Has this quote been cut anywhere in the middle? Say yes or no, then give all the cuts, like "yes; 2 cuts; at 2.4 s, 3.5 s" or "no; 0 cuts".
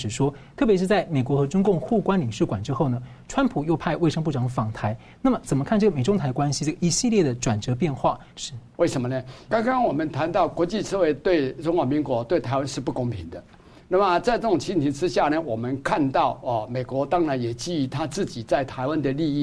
yes; 2 cuts; at 8.3 s, 9.5 s